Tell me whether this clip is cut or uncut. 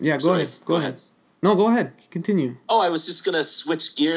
uncut